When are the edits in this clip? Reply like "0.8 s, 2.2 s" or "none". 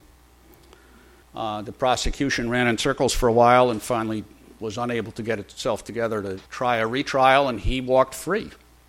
1.2 s, 6.5 s